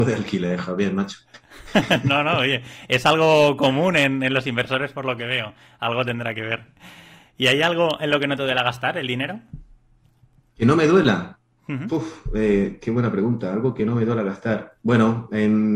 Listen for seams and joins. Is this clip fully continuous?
yes; 0 cuts

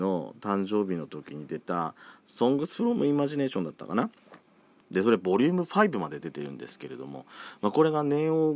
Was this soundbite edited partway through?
yes; 1 cut; at 4.8 s

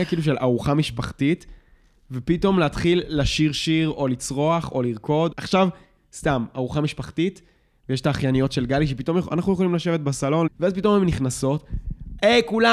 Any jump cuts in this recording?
yes; 2 cuts; at 5.3 s, 10.5 s

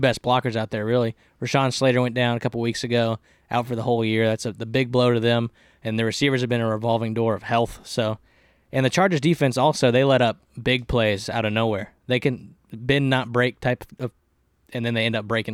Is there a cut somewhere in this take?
no; 0 cuts

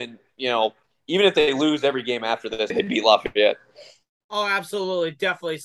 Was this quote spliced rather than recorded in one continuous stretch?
yes; 1 cut; at 2.7 s

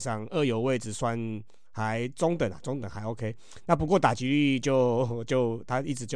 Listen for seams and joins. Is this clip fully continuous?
yes; 0 cuts

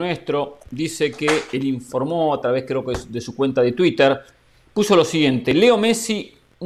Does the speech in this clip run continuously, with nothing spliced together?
yes; 0 cuts

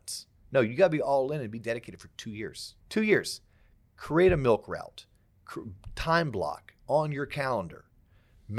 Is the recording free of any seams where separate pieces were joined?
no; 1 cut; at 2.8 s

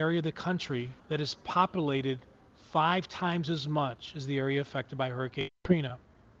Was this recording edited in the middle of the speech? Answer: yes; 1 cut; at 1.0 s

